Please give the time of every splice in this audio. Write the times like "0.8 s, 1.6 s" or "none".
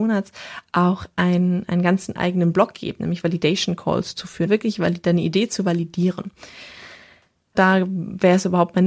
4.5 s, 7.5 s